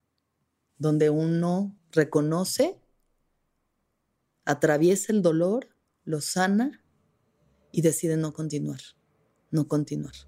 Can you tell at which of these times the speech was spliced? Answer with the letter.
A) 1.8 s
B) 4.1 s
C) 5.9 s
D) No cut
A